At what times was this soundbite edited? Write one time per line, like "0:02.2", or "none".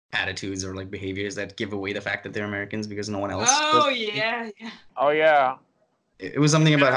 0:04.9